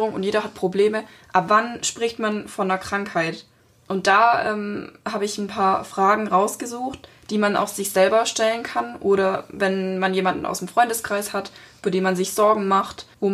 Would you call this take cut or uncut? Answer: uncut